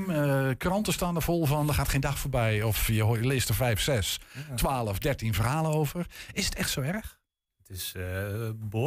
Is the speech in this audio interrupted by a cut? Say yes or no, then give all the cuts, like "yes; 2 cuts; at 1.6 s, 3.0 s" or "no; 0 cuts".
no; 0 cuts